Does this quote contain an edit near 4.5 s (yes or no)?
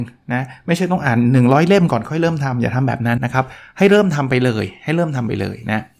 no